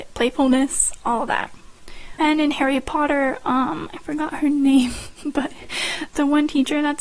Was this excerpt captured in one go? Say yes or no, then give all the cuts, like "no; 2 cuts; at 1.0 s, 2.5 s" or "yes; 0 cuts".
no; 1 cut; at 2.2 s